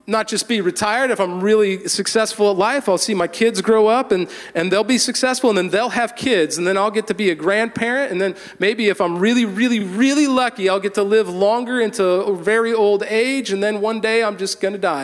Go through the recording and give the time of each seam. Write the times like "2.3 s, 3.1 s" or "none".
none

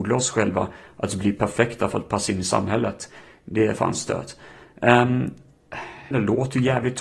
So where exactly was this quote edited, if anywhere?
6.1 s

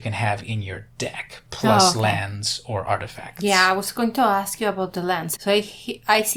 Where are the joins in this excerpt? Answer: 5.3 s

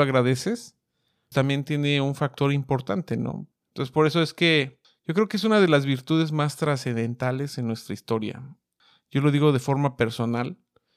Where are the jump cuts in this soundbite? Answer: 1.3 s, 3.5 s

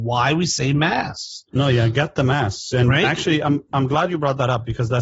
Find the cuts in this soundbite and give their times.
3.7 s

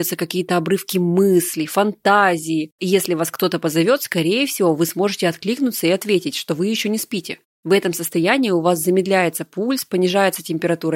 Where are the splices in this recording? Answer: none

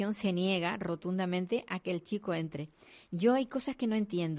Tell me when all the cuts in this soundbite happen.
none

